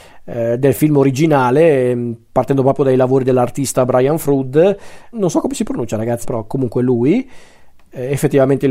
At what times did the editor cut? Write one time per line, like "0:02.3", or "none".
0:05.1
0:06.2